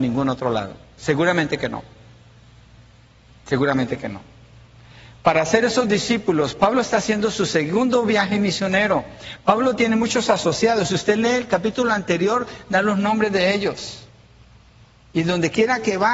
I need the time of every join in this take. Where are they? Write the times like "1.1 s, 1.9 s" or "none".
none